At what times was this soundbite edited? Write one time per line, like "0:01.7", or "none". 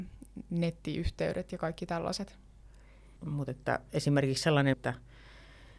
0:03.2
0:04.7